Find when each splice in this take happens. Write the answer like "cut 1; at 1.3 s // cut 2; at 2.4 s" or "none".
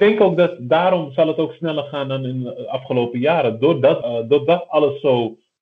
cut 1; at 4.0 s